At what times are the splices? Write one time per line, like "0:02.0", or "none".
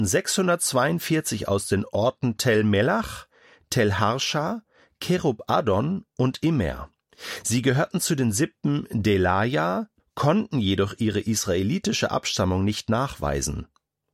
0:10.0